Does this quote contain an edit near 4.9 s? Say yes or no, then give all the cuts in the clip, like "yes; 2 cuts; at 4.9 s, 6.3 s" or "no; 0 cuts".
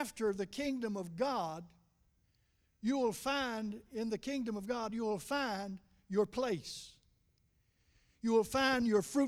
yes; 1 cut; at 4.9 s